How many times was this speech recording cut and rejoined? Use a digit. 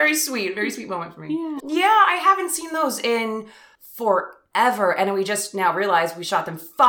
1